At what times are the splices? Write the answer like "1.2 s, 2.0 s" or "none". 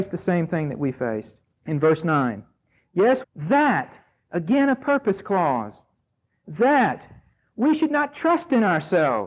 1.6 s, 3.2 s